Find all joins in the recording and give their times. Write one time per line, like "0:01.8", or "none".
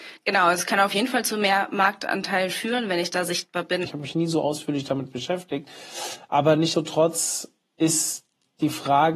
0:03.8
0:06.7